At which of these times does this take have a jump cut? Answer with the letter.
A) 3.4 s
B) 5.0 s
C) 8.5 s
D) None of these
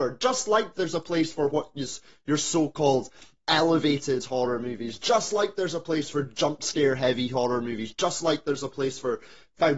D